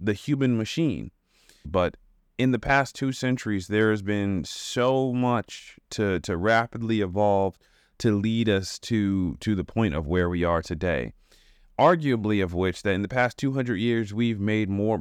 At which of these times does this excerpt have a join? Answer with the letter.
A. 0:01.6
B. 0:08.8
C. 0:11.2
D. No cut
A